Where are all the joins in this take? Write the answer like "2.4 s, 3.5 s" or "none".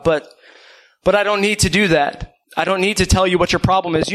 2.4 s